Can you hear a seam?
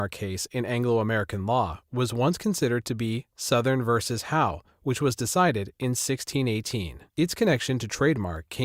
yes; 1 cut; at 7.1 s

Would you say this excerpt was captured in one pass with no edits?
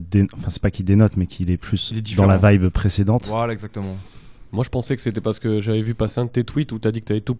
no; 1 cut; at 1.9 s

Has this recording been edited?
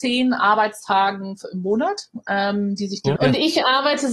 yes; 1 cut; at 3.2 s

